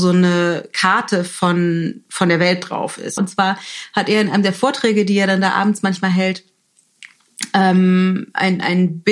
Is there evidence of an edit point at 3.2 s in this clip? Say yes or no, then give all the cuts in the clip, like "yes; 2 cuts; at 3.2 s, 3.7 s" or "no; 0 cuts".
yes; 1 cut; at 3.2 s